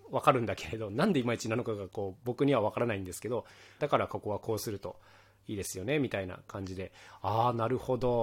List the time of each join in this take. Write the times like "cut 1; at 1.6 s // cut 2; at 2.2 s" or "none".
cut 1; at 3.8 s